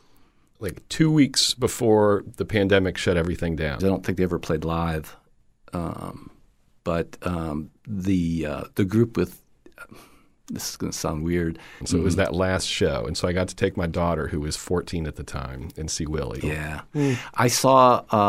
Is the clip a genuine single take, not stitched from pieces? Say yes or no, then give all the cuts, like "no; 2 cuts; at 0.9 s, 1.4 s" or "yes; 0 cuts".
no; 3 cuts; at 3.8 s, 11.8 s, 16.4 s